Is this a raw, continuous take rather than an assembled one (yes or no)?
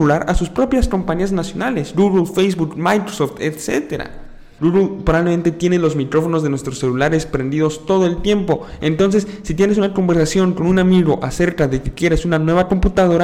no